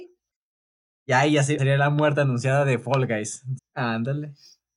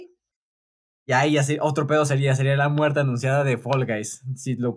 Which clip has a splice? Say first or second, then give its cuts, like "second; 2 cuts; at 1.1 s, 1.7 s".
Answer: first; 2 cuts; at 1.6 s, 3.6 s